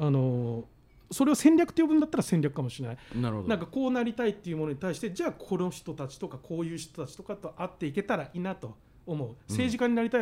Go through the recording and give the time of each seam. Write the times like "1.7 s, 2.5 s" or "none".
8.3 s